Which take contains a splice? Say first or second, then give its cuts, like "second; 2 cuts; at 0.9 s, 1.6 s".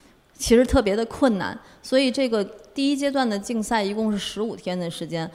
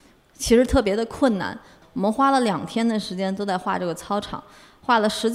second; 1 cut; at 1.8 s